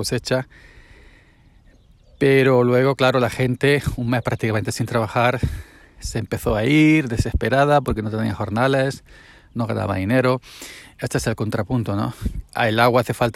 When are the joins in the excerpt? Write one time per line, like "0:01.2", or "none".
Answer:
none